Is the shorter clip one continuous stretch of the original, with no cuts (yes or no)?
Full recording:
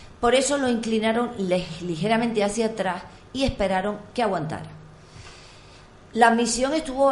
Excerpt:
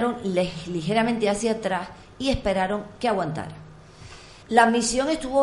no